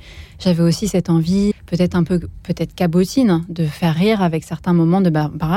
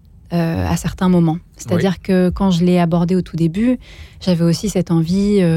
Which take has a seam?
first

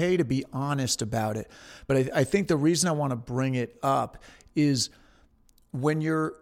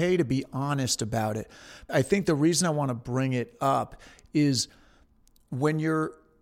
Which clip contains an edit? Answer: second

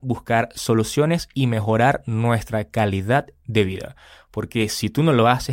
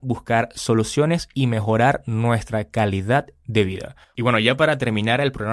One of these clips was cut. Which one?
second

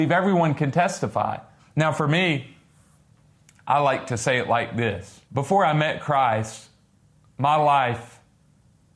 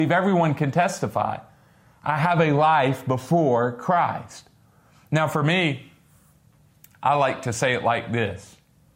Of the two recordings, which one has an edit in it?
first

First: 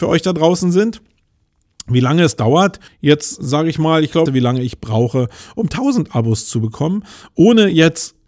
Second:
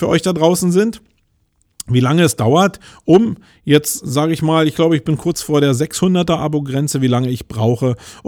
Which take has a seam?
first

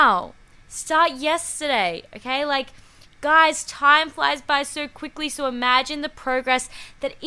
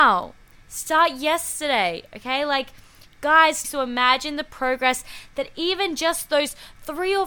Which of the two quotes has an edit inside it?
second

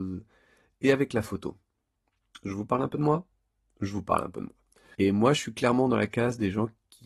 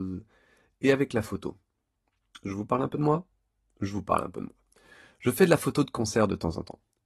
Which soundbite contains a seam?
first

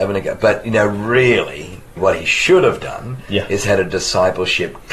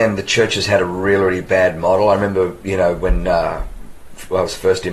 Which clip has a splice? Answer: first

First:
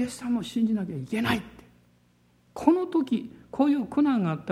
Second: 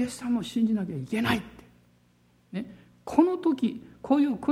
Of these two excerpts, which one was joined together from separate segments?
first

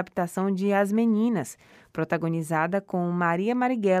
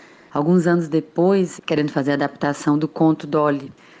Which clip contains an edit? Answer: second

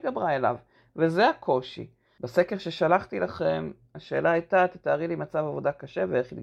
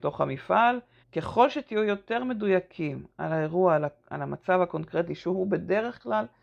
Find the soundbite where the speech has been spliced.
second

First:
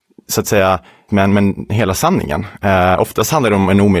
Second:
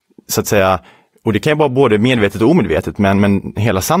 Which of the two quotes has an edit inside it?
first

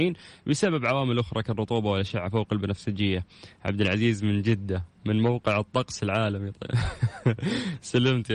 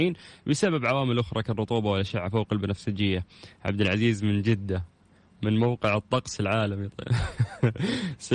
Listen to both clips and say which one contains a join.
first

